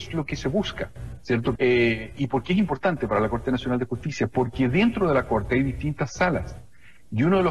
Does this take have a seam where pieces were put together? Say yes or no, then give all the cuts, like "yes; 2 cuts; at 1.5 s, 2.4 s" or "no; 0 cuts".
yes; 1 cut; at 1.6 s